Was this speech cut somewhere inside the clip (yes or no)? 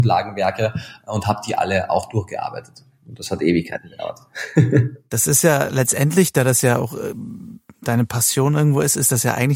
no